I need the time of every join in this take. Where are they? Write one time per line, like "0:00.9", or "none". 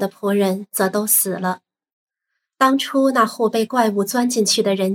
none